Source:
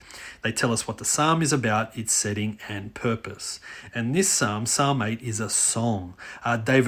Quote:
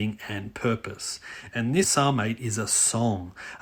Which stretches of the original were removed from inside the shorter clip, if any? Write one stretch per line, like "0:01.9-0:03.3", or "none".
0:04.2-0:04.7